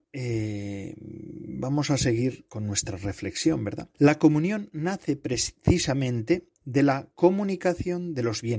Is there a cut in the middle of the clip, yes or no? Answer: yes